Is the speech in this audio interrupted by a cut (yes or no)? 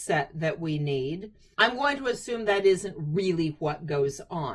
yes